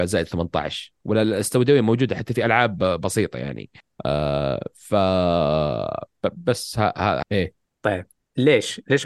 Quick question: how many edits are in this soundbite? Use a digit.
1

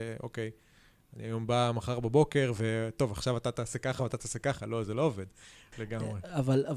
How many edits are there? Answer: 1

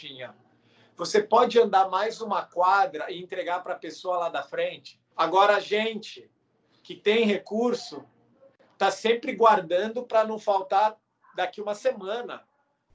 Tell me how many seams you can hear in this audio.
1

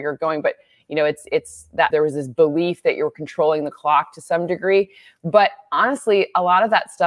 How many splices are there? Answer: 1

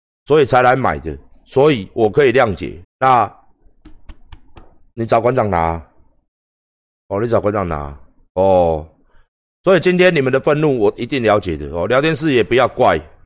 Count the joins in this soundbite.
1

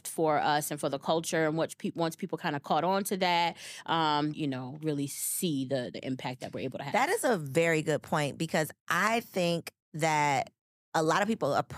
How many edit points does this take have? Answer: 1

